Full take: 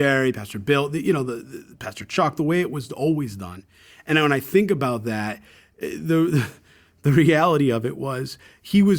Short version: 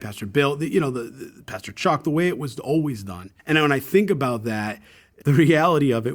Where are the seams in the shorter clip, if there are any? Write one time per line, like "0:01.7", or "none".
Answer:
0:03.4
0:05.2